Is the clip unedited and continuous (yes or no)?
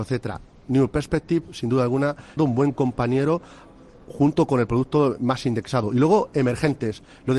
no